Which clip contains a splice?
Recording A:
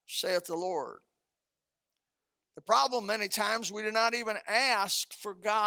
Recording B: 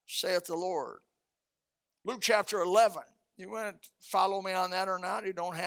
B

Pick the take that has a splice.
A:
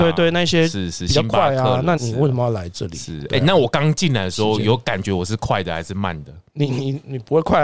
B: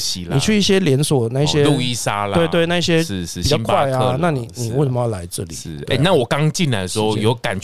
A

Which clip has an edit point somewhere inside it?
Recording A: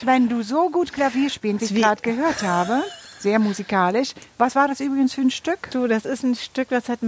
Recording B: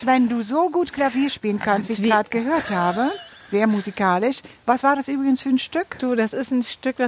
A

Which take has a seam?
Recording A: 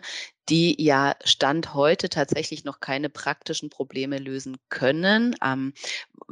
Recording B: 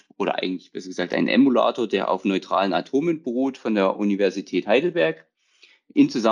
A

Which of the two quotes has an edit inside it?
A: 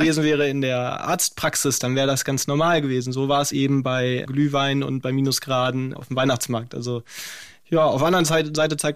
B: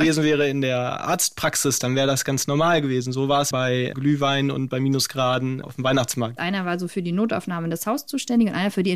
B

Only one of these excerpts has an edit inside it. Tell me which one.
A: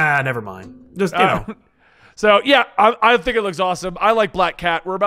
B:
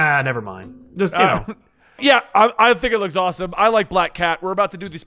B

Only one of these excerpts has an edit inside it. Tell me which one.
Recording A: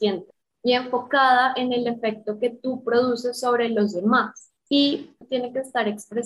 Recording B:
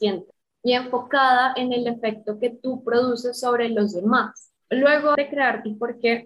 B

